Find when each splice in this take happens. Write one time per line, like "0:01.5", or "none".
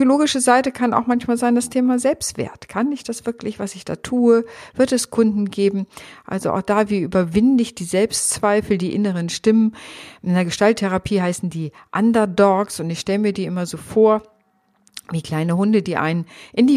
none